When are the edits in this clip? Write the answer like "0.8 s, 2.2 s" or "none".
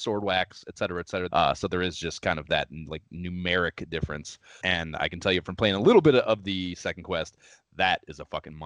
1.3 s, 4.6 s